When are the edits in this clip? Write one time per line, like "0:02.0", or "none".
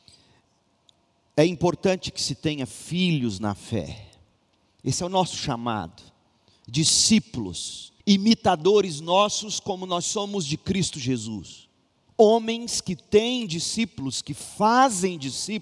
0:08.0
0:12.1